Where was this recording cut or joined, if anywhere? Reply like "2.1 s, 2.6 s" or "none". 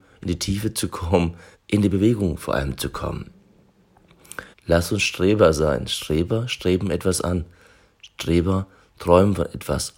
1.5 s, 4.5 s